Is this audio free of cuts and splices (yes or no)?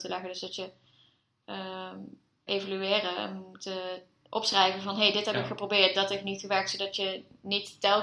no